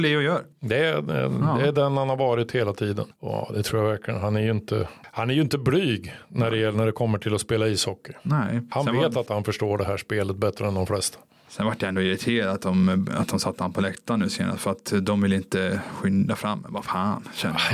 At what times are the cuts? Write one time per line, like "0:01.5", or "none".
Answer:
0:03.1